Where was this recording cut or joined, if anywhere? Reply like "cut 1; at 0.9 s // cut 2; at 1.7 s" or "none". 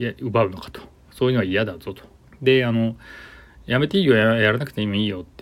cut 1; at 1.0 s // cut 2; at 2.3 s